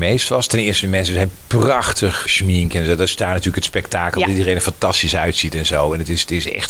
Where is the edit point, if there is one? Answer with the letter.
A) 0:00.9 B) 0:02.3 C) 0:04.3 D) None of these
B